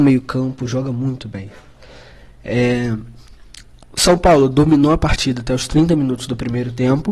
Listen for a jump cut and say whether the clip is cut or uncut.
uncut